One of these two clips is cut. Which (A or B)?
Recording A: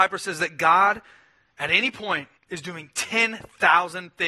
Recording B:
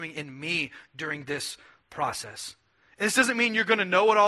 A